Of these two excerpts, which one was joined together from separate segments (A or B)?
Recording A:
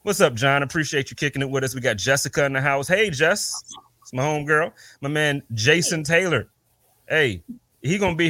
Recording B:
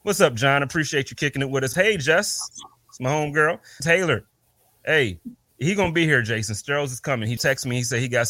B